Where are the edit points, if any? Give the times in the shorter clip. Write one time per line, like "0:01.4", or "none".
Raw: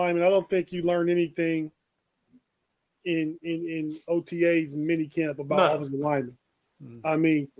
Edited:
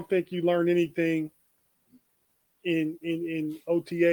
none